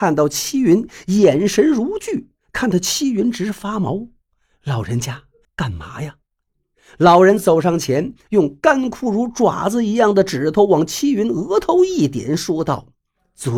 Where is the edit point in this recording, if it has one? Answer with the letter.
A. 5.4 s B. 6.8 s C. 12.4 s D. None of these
A